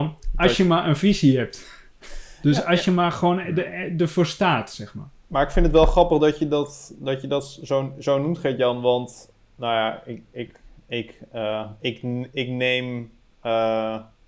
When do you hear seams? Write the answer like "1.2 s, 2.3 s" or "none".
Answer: none